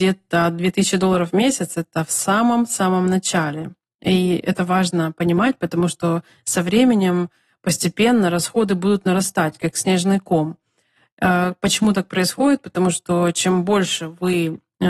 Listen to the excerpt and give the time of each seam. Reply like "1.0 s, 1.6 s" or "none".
none